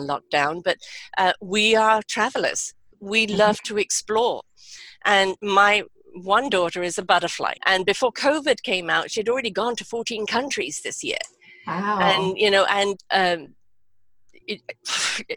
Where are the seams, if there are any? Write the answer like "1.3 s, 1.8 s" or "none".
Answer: 7.6 s, 13.0 s